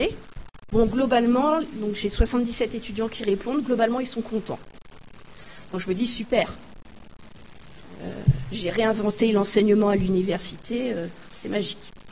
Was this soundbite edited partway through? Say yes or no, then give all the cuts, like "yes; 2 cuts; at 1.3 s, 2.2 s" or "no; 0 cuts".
no; 0 cuts